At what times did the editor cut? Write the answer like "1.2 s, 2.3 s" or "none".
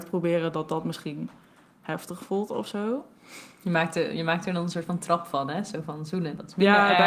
none